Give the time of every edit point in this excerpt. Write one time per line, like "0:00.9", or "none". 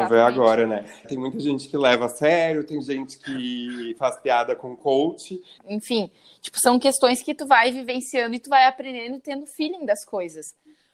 0:01.0
0:05.6

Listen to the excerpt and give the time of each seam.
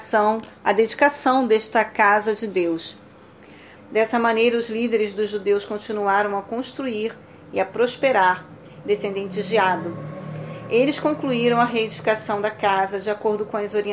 0:03.8
0:08.8

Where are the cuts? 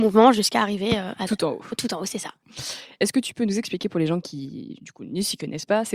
none

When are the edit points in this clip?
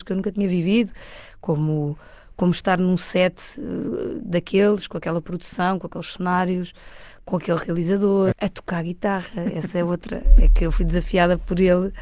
0:08.3

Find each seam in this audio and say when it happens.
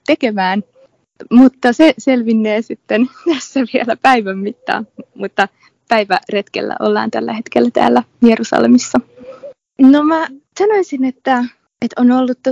0:09.7

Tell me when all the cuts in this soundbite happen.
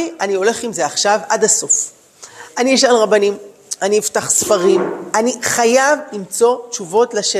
none

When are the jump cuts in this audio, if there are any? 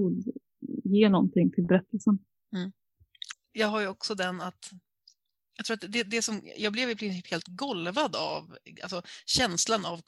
0:03.3

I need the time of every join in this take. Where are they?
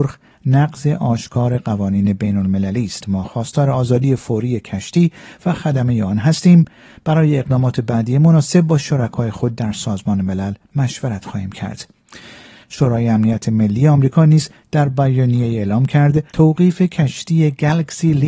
0:12.6
0:16.3

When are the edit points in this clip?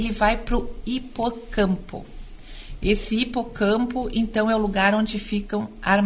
none

